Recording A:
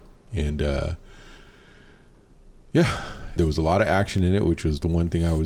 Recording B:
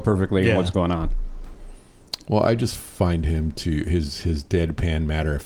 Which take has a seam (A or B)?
A